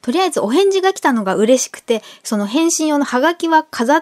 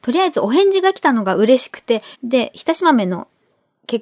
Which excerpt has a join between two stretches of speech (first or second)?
second